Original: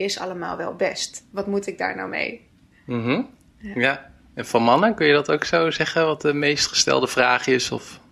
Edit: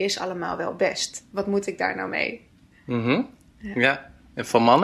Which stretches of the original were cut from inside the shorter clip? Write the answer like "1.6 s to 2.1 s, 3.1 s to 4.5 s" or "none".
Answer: none